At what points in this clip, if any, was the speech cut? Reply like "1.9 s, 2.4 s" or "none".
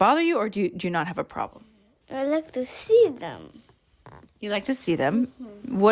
none